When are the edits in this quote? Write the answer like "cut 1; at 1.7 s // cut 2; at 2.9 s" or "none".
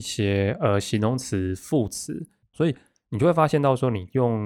cut 1; at 2.5 s